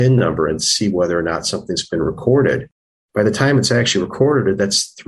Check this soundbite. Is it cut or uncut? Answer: uncut